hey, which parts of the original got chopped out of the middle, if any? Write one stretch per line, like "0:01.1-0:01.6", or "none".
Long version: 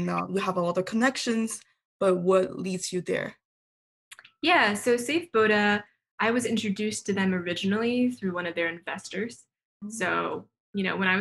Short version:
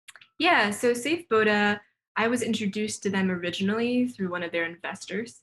none